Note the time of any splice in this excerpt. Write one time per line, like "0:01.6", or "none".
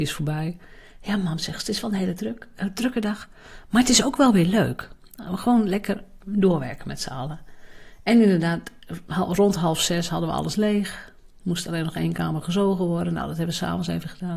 none